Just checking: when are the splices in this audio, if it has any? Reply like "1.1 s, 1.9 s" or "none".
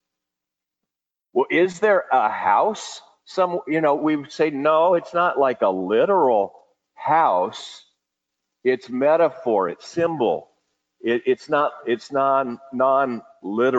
none